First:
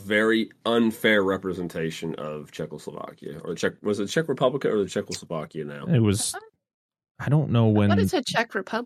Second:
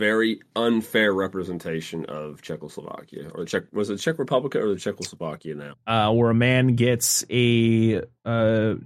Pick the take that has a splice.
second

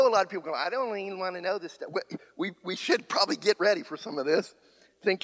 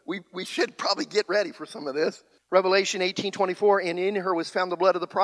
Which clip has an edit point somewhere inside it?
second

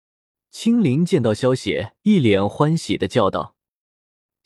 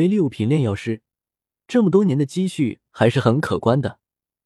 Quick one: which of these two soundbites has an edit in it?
first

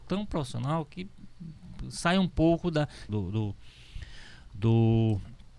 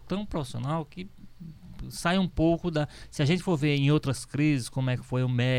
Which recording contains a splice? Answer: first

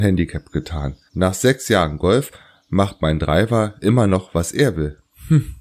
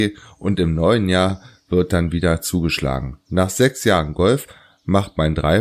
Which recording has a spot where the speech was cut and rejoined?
first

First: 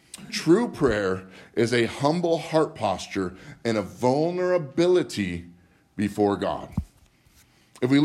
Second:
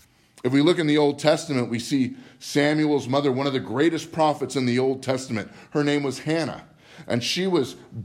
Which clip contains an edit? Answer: second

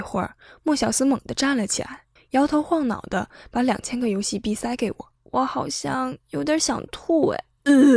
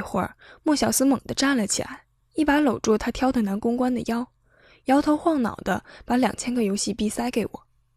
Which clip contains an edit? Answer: first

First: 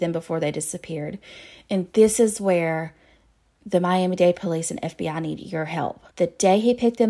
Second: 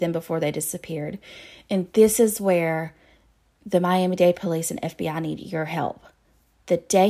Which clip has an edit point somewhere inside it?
first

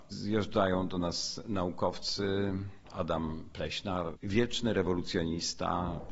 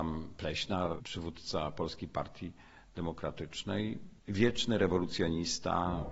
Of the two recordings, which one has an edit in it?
first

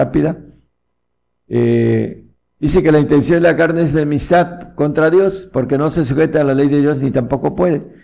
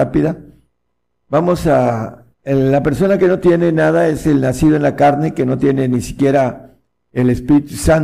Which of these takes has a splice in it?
second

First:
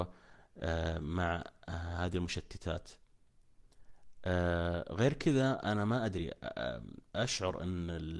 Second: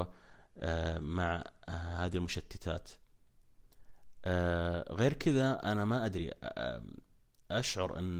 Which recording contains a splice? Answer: first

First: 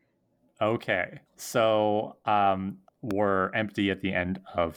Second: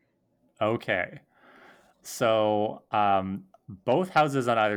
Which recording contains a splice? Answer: first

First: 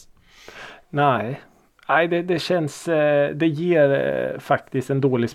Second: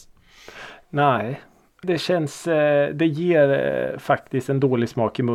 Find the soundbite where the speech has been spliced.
second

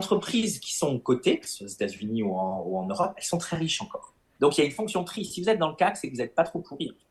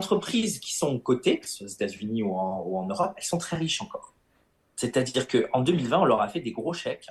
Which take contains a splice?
first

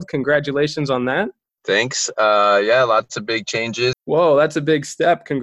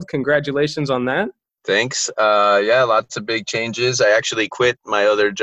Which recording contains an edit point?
first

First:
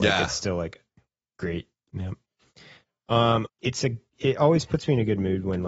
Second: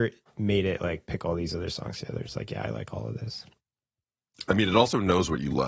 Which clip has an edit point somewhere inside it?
first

